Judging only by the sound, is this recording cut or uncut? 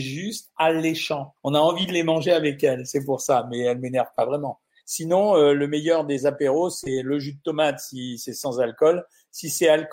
cut